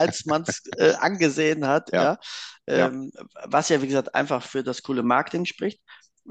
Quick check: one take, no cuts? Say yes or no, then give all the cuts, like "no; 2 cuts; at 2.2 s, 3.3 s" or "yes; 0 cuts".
yes; 0 cuts